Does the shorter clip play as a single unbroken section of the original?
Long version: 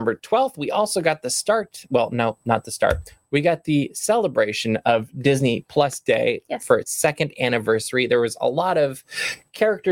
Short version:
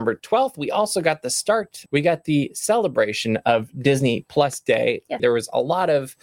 no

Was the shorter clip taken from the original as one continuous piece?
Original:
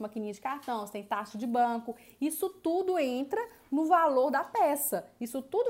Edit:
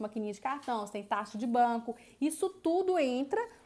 yes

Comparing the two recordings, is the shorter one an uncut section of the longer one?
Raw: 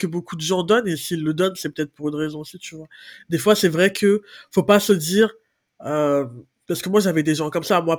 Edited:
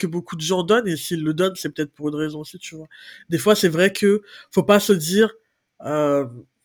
yes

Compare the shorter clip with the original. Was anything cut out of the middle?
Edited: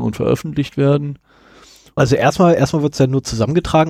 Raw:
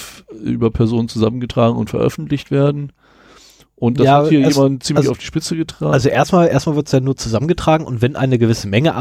yes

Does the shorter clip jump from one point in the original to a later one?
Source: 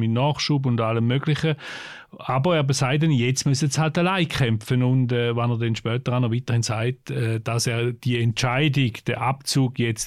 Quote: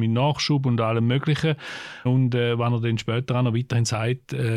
yes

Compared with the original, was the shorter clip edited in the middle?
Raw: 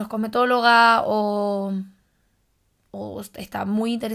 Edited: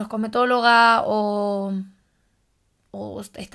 no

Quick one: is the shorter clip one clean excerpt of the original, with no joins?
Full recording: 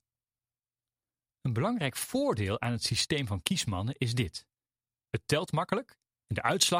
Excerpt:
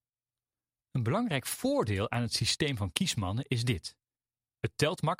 yes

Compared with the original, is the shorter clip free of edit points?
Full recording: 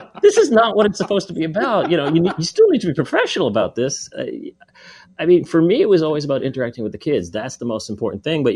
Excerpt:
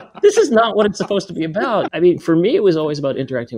no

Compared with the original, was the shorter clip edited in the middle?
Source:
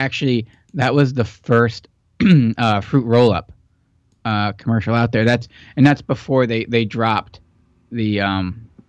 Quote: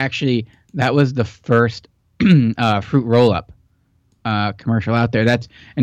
no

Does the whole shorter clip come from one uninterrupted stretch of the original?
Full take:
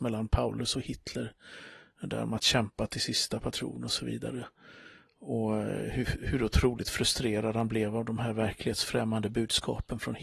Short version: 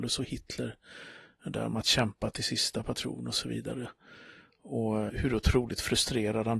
no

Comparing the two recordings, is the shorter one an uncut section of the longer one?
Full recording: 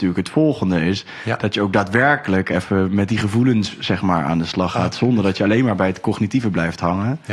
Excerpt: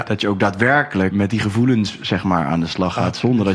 no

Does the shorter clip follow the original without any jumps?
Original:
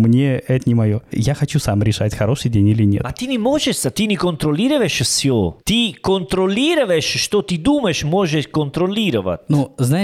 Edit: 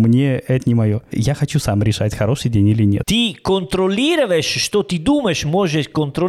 no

